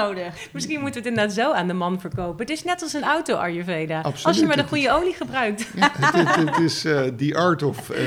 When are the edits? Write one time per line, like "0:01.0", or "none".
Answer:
none